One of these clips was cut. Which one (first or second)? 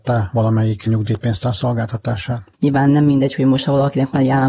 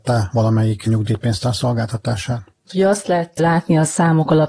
first